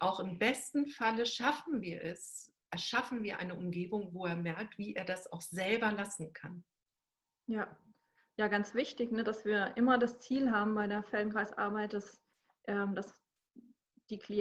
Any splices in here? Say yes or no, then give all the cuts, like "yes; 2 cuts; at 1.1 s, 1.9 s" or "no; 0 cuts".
no; 0 cuts